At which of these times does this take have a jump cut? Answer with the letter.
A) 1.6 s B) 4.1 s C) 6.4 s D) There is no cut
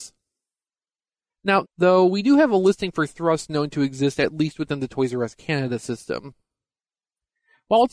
A